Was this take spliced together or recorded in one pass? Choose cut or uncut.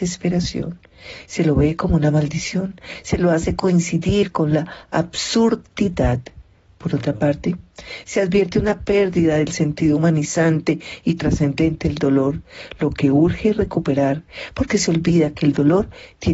uncut